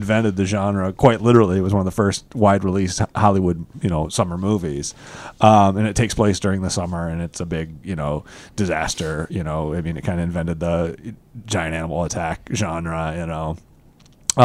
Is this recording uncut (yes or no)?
yes